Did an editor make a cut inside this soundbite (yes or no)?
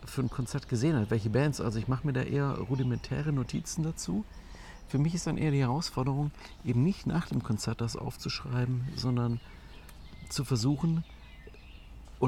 no